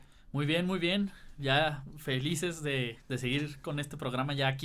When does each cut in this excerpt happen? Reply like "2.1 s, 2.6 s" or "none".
3.0 s

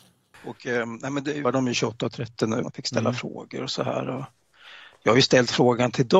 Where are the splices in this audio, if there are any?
1.4 s, 2.6 s

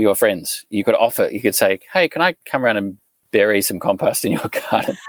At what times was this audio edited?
none

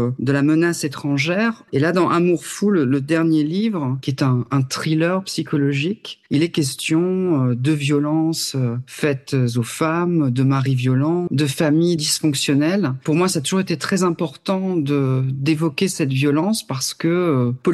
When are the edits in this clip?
1.7 s, 11.3 s

